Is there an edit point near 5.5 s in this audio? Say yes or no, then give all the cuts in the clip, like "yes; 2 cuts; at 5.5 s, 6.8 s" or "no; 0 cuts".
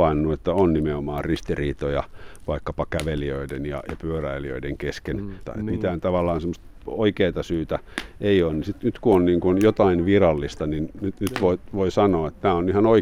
yes; 1 cut; at 5.5 s